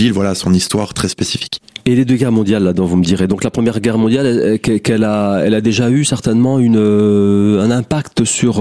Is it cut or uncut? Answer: uncut